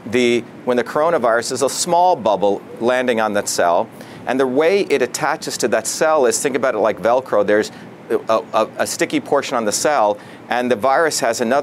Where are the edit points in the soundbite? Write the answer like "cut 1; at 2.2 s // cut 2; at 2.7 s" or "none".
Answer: none